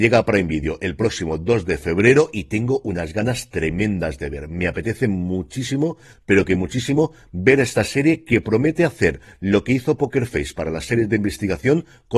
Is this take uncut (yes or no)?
yes